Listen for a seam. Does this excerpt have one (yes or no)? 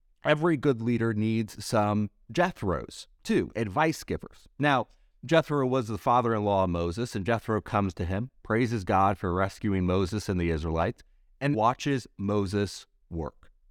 yes